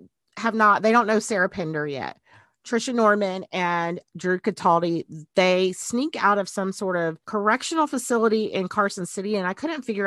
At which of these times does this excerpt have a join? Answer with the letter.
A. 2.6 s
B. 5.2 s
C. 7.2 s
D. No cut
D